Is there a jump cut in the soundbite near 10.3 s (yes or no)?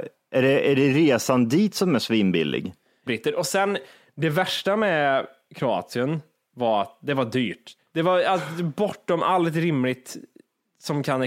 no